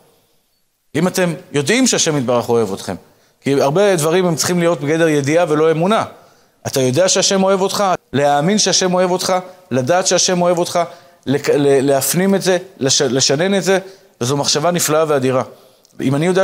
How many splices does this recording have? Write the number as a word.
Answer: one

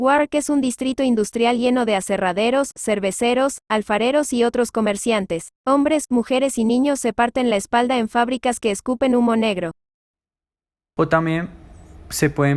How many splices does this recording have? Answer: two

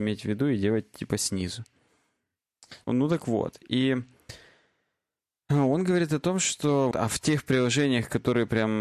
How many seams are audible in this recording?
two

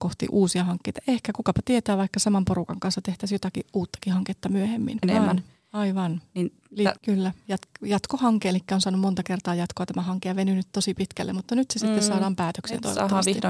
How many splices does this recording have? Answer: two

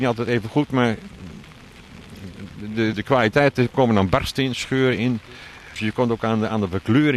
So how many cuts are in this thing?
two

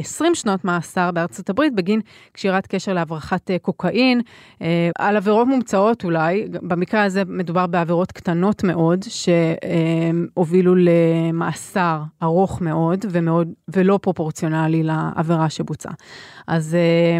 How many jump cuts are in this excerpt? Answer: one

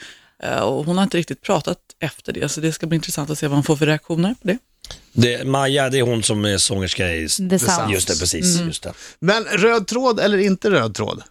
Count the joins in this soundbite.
zero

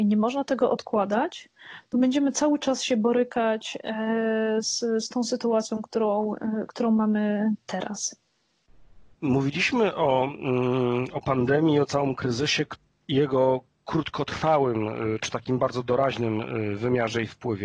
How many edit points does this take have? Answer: one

